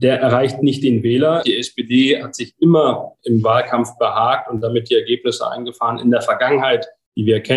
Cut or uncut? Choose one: cut